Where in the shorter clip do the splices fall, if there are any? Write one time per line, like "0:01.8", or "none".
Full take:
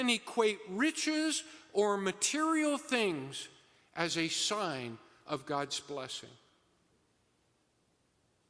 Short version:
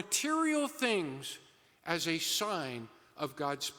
none